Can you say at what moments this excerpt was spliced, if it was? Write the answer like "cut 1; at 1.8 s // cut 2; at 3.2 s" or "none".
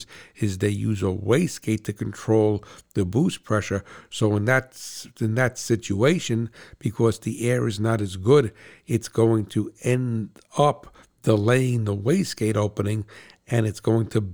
none